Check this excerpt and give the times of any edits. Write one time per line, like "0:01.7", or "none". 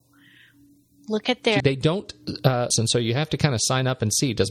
0:01.6
0:02.7